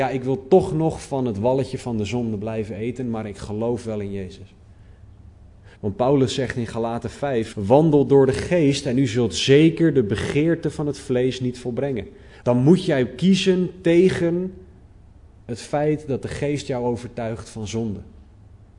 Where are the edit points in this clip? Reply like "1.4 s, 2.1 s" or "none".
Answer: 5.7 s, 7.5 s, 12.4 s